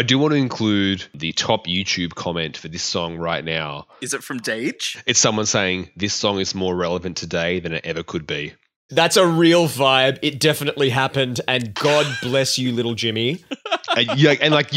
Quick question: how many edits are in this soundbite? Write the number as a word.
one